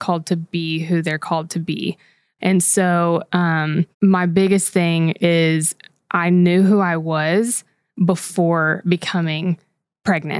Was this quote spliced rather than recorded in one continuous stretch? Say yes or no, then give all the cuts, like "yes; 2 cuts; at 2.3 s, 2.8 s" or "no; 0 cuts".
yes; 2 cuts; at 2.4 s, 3.9 s